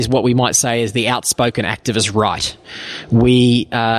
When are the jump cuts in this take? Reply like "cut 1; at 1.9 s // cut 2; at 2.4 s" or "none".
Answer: none